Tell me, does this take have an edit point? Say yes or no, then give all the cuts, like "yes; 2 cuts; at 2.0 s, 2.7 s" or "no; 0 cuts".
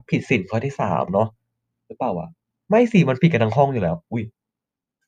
no; 0 cuts